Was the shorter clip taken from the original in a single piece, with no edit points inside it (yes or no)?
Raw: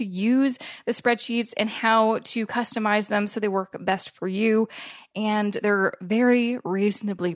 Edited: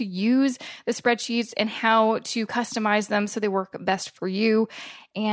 yes